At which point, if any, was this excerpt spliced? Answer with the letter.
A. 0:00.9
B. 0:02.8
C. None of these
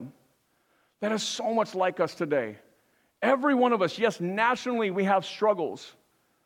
C